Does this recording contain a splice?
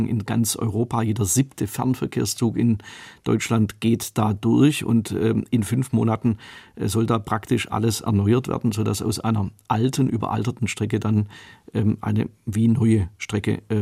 no; 0 cuts

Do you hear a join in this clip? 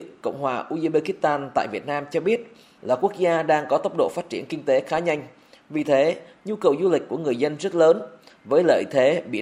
yes; 1 cut; at 2.8 s

